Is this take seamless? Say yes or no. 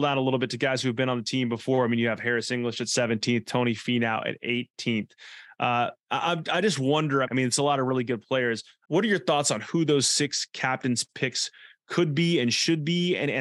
no